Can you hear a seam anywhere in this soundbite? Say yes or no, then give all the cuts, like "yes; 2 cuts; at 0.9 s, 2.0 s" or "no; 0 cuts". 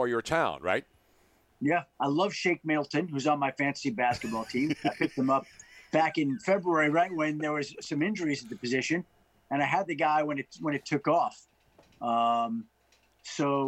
yes; 2 cuts; at 1.9 s, 5.9 s